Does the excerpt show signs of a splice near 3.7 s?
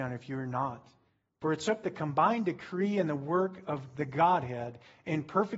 no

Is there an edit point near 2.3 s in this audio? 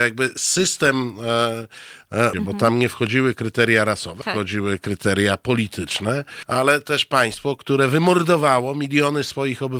yes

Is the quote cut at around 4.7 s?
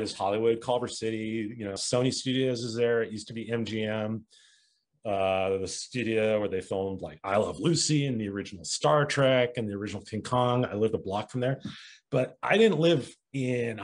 no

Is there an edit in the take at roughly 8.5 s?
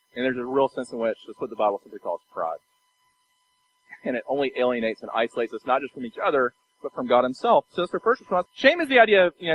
yes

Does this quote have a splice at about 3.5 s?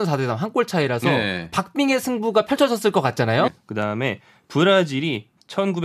yes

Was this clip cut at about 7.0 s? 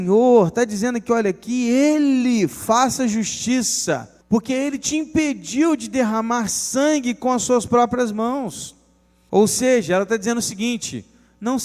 no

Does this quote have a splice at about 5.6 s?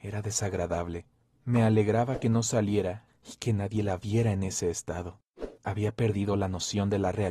yes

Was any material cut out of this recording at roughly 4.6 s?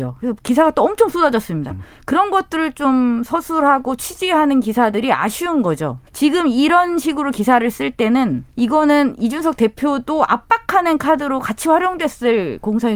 no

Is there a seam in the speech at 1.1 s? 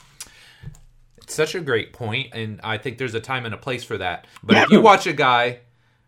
no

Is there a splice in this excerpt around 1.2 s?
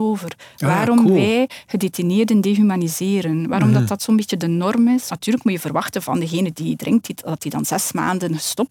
no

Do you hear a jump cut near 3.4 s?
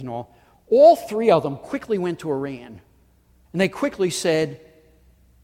yes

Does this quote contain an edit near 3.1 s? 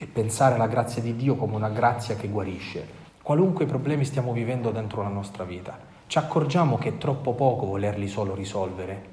yes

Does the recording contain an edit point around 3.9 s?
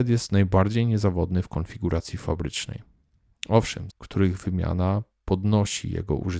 yes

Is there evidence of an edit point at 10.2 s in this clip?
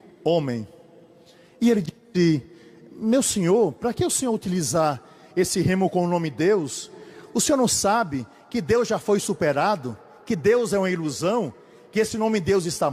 no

